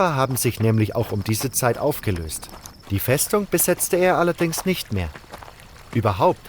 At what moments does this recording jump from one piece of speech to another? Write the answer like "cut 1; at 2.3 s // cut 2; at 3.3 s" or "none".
cut 1; at 2.8 s